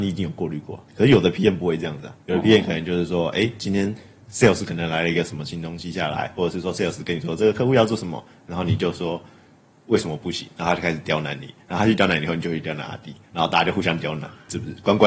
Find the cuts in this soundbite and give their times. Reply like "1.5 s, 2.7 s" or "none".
none

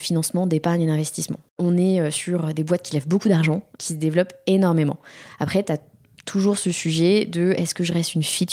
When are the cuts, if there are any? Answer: 1.5 s

